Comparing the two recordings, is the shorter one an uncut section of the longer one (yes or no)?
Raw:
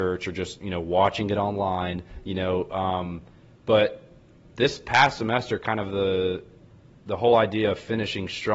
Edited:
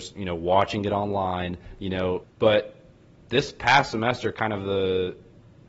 no